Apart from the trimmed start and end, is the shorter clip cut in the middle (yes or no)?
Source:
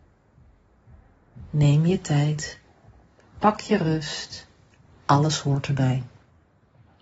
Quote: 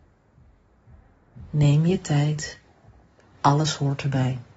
yes